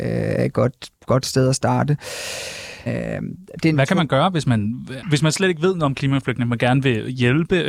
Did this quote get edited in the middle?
yes; 2 cuts; at 2.9 s, 5.0 s

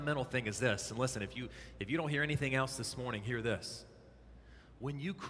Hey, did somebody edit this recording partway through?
no; 0 cuts

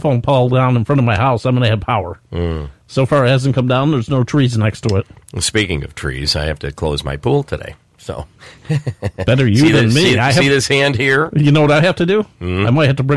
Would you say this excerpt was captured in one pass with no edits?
yes; 0 cuts

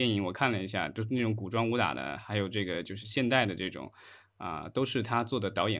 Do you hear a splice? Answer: no; 0 cuts

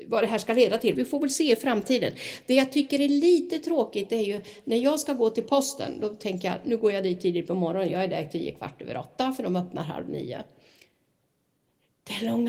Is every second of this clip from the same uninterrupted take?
no; 1 cut; at 0.9 s

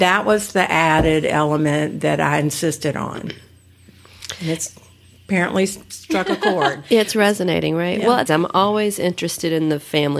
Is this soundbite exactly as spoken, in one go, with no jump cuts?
no; 1 cut; at 8.3 s

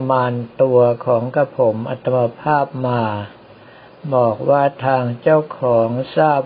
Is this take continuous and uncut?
yes; 0 cuts

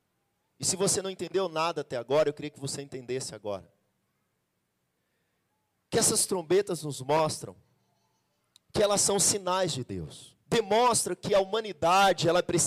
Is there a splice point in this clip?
yes; 1 cut; at 10.4 s

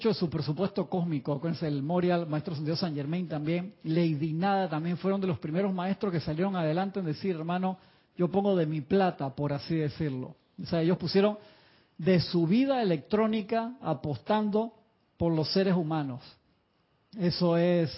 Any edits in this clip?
no; 0 cuts

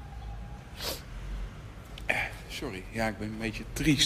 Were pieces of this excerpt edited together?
no; 0 cuts

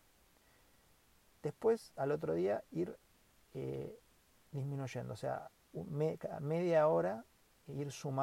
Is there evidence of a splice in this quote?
no; 0 cuts

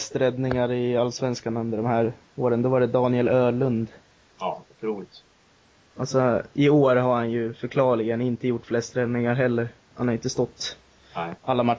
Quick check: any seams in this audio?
yes; 1 cut; at 4.3 s

